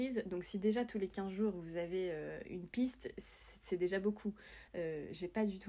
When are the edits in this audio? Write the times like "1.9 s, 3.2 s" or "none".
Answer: none